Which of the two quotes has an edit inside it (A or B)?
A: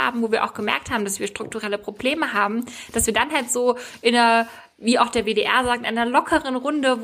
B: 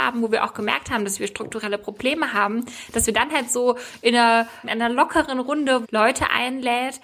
B